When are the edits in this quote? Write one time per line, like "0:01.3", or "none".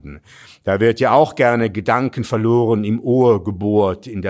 none

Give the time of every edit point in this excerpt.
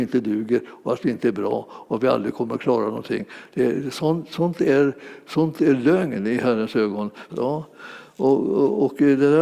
0:07.3

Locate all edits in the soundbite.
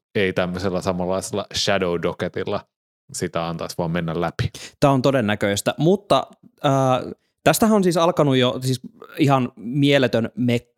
none

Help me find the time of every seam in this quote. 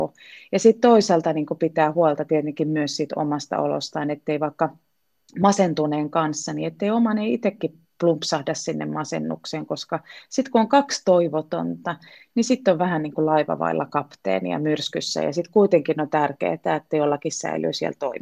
none

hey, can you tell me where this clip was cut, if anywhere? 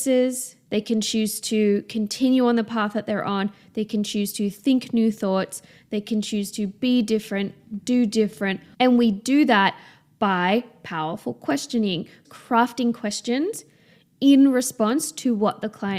0:08.7
0:12.2

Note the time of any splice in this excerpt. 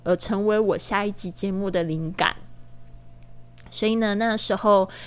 none

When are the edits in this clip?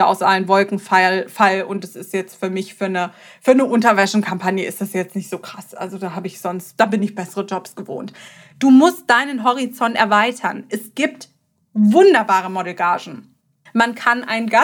0:13.7

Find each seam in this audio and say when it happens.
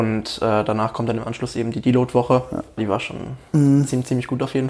0:02.8

